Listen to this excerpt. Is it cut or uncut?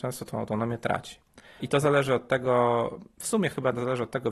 uncut